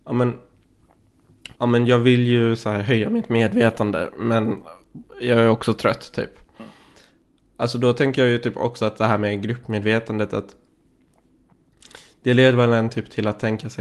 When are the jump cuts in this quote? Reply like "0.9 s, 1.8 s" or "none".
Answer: 1.5 s